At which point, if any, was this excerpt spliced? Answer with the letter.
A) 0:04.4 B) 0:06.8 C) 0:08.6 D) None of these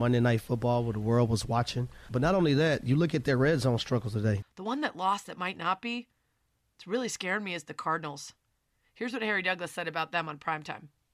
A